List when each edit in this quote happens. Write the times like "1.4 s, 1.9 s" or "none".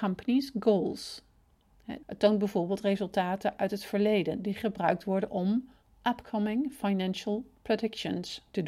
2.0 s

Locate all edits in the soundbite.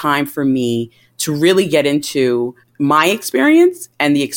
2.6 s

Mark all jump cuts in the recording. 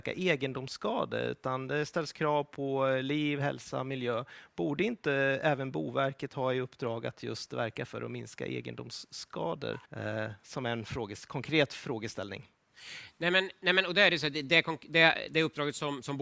9.9 s

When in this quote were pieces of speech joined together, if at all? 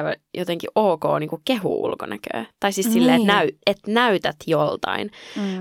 none

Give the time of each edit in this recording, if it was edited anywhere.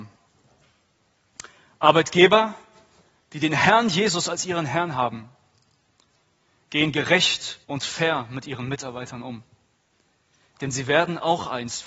7.6 s

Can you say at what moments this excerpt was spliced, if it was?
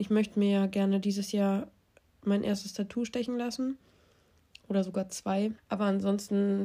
5.6 s

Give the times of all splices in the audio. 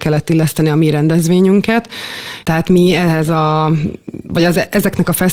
2.4 s

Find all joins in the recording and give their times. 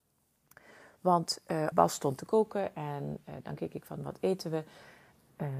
1.7 s

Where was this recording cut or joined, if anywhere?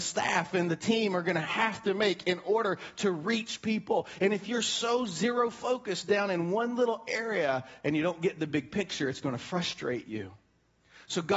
none

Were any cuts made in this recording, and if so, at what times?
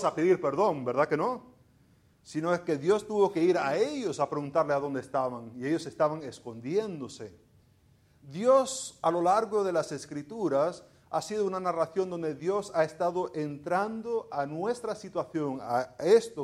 none

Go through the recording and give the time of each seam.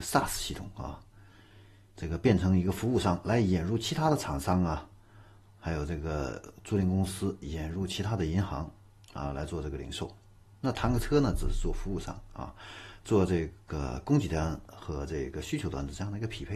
none

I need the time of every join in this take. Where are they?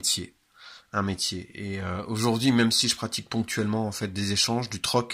none

